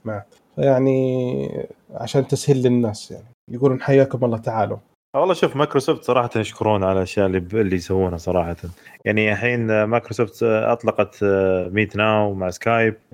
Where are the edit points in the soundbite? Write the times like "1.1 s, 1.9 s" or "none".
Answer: none